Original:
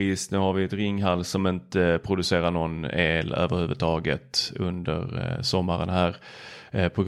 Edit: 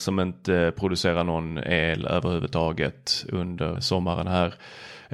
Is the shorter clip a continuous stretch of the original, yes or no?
no